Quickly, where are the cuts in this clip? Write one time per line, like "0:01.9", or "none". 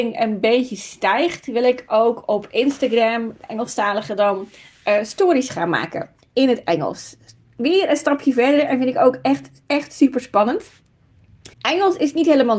0:11.5